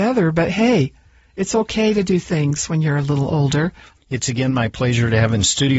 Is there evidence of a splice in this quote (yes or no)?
yes